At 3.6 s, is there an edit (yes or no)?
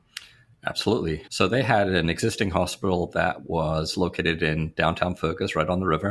no